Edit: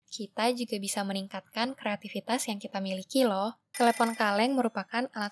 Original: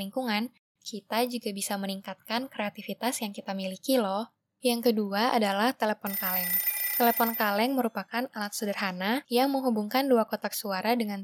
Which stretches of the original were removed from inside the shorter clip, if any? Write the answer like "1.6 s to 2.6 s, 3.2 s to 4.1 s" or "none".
4.5 s to 6.9 s

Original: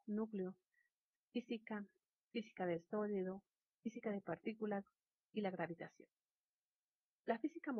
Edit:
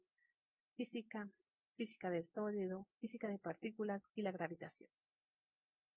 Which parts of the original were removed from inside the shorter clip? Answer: 3.5 s to 3.8 s, 4.9 s to 5.3 s

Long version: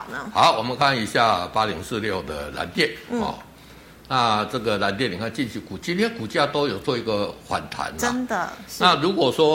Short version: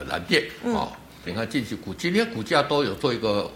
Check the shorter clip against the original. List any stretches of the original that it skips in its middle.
3.7 s to 5.1 s

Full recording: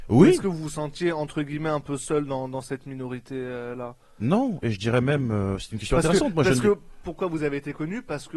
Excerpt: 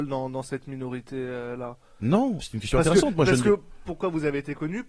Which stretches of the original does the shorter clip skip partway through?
4.6 s to 5.6 s

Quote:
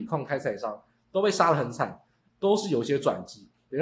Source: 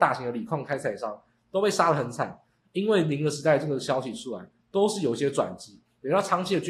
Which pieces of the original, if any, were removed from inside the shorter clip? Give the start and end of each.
2.7 s to 4.6 s

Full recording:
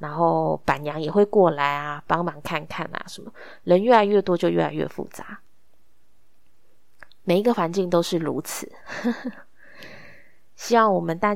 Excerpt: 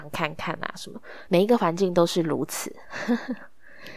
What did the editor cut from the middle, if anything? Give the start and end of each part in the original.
3.6 s to 7.2 s

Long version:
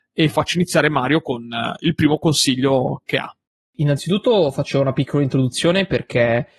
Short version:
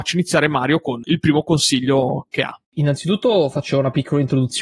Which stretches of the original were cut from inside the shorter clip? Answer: 1.4 s to 1.8 s, 3.4 s to 3.7 s

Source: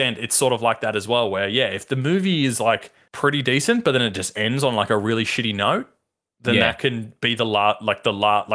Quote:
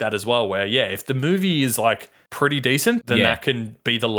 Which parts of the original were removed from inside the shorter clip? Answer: 3.8 s to 6.4 s

